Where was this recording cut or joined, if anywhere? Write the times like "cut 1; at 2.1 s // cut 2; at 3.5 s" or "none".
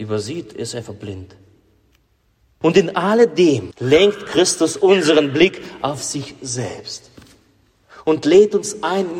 cut 1; at 2.6 s // cut 2; at 3.7 s